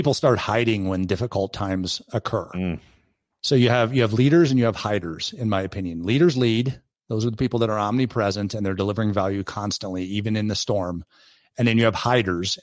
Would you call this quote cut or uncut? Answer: uncut